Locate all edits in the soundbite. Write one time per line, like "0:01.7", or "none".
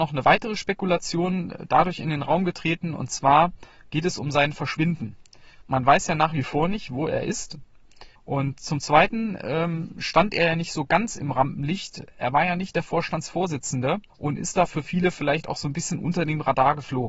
0:08.2
0:14.1

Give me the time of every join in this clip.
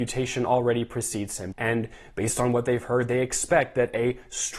0:01.5

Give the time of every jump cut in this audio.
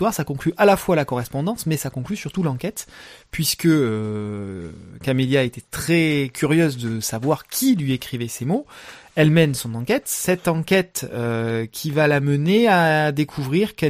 none

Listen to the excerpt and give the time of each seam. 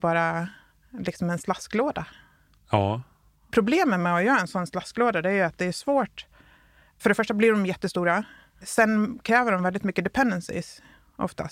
none

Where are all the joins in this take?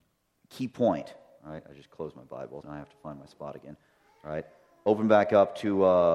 0:01.4
0:02.6

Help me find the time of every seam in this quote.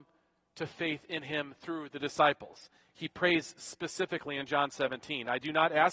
none

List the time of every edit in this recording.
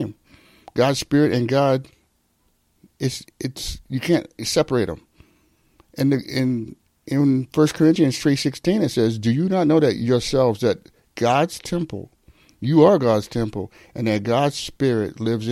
none

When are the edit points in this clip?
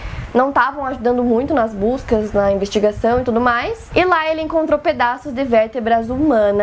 none

